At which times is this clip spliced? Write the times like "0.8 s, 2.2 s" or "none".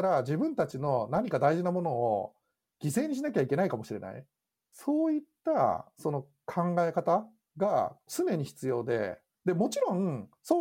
none